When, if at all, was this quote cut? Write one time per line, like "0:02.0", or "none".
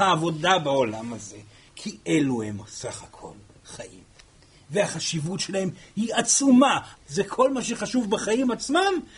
0:06.9